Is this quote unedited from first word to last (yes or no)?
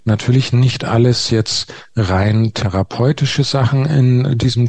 yes